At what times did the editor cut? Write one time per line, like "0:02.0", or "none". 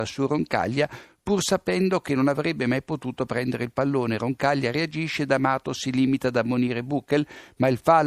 none